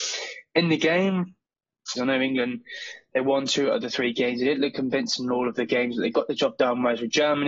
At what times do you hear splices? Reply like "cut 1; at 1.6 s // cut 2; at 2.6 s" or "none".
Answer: cut 1; at 2.0 s